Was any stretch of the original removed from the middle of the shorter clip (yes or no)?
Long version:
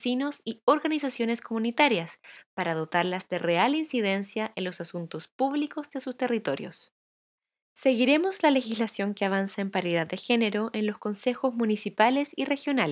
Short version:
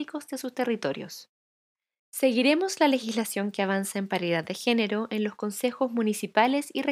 no